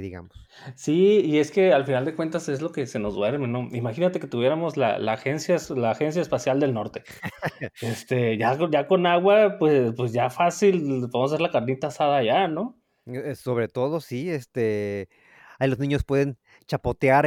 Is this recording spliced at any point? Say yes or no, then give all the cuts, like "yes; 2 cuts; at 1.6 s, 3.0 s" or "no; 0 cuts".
no; 0 cuts